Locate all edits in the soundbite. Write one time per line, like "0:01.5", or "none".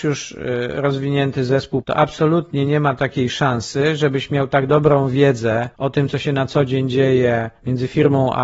0:01.8
0:05.7